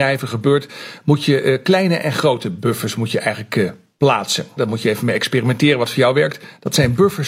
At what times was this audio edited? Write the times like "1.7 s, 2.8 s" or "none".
4.6 s